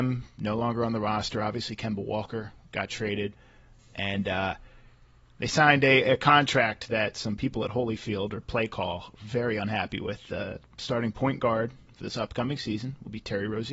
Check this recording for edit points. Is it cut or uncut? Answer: uncut